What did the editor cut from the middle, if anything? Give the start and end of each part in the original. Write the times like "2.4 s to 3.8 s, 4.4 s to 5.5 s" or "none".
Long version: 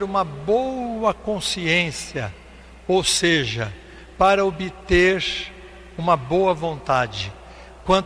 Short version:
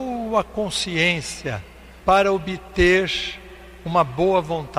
2.7 s to 4.1 s